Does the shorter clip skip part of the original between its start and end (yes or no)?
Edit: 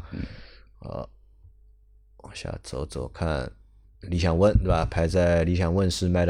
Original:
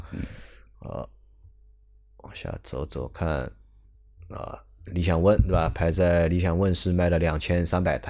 yes